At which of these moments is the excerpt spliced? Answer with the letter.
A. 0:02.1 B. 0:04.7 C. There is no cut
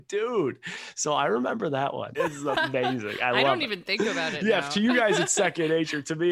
A